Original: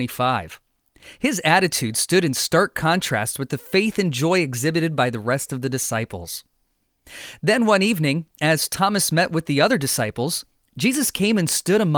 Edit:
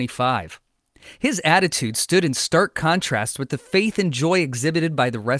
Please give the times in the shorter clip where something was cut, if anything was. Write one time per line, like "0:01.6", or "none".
none